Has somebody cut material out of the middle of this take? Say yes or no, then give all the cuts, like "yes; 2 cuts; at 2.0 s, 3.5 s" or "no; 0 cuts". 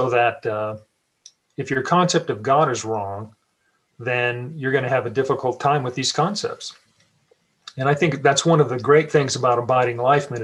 no; 0 cuts